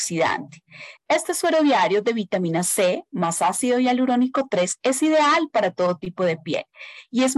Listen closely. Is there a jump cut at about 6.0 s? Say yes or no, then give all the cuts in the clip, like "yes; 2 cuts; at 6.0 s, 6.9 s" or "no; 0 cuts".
no; 1 cut; at 1.0 s